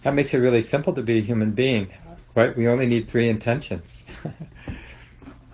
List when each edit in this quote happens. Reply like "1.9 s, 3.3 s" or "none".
none